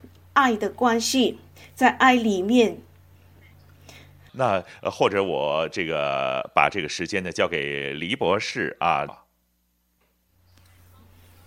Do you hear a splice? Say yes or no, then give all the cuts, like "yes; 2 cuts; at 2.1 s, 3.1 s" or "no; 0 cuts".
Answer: yes; 2 cuts; at 4.3 s, 9.1 s